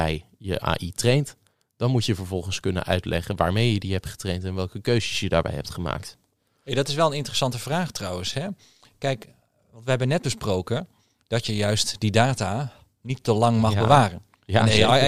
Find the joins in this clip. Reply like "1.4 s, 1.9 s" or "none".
none